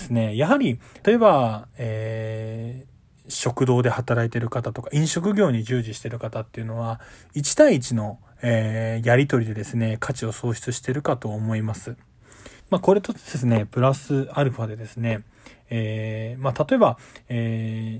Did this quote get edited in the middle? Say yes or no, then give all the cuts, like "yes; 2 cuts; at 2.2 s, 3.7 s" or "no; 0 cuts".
yes; 2 cuts; at 1.0 s, 12.6 s